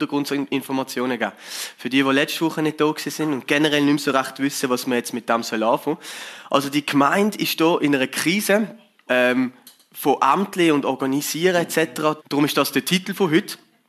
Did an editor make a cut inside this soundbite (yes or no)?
yes